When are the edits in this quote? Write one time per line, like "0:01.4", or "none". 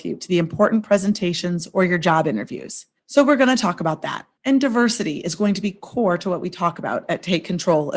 0:03.0
0:04.4